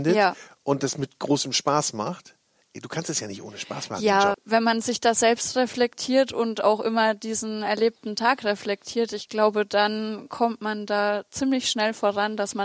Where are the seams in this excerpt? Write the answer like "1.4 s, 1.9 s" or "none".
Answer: 4.3 s